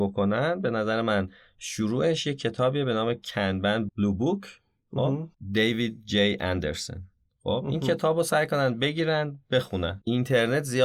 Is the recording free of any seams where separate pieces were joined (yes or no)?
no